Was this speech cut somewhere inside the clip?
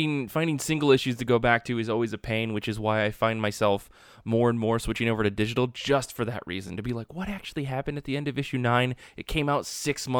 no; 0 cuts

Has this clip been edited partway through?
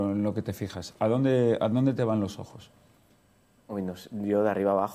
no; 0 cuts

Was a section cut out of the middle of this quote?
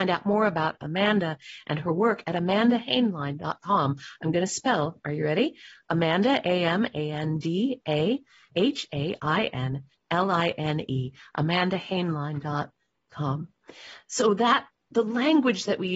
yes; 1 cut; at 8.5 s

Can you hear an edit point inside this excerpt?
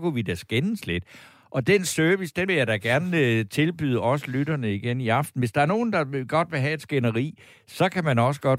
no; 0 cuts

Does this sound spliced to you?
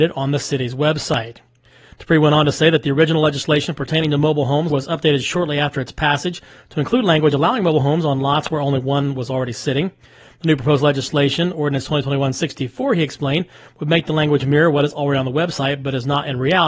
yes; 1 cut; at 4.7 s

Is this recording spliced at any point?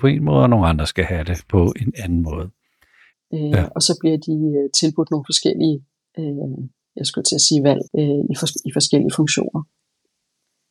yes; 2 cuts; at 3.1 s, 7.9 s

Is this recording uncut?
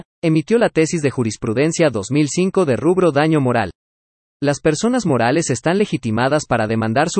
yes; 0 cuts

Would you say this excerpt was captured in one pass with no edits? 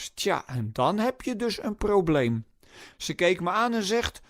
no; 1 cut; at 2.9 s

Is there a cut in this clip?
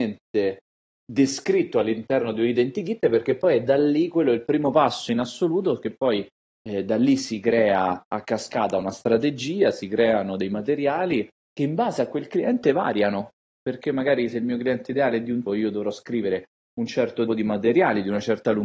yes; 2 cuts; at 15.5 s, 17.3 s

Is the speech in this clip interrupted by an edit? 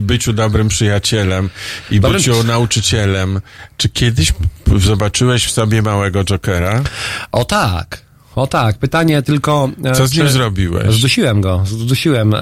no; 0 cuts

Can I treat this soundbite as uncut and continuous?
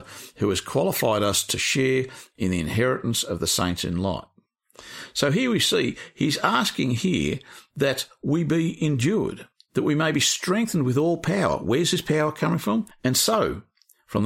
no; 1 cut; at 12.9 s

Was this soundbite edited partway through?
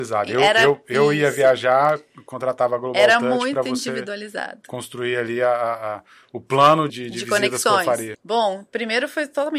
yes; 2 cuts; at 6.9 s, 8.1 s

